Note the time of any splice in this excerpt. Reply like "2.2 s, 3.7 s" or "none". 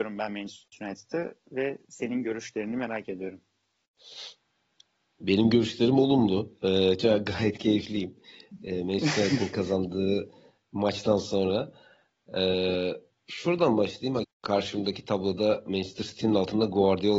14.2 s